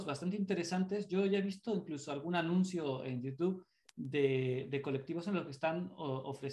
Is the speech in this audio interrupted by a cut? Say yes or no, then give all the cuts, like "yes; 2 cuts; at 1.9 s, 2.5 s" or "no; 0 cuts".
no; 0 cuts